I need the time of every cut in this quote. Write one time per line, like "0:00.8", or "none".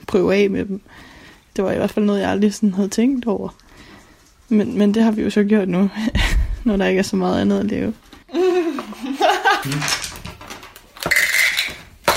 0:08.2
0:09.6